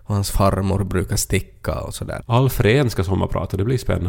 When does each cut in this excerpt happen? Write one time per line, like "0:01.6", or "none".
0:02.2